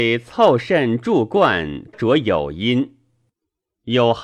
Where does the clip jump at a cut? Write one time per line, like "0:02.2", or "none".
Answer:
0:01.9

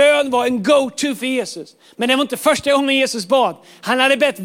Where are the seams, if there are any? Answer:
none

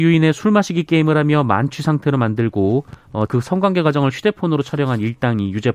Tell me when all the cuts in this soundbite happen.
0:03.3

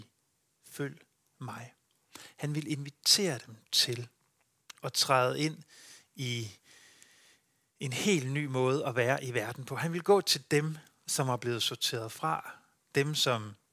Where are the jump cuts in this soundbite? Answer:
none

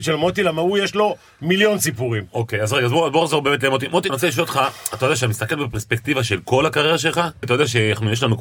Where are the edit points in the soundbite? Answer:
0:04.1
0:07.4

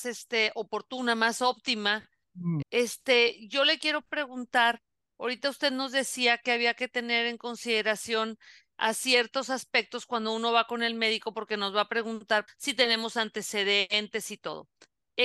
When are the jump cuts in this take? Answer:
0:02.6
0:12.5

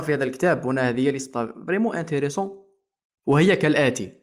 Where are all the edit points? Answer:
none

